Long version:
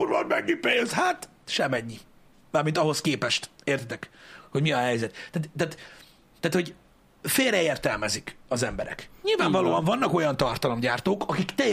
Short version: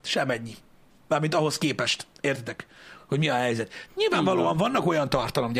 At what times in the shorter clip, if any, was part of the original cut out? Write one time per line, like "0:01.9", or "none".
0:03.9